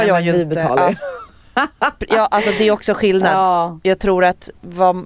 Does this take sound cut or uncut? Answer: uncut